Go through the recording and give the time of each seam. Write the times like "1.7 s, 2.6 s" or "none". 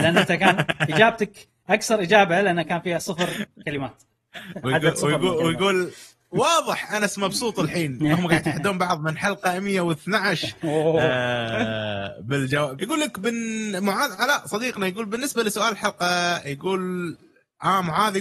12.8 s